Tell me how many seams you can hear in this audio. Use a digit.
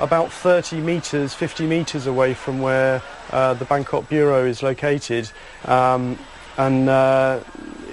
1